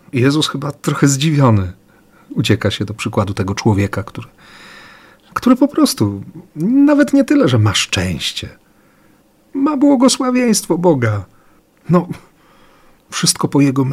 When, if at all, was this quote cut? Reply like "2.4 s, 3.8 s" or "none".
11.7 s